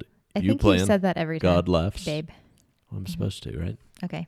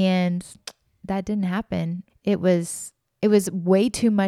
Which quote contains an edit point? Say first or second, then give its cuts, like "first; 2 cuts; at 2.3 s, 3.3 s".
second; 1 cut; at 2.1 s